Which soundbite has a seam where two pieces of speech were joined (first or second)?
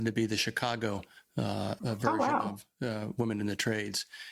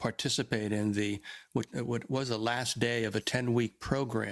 first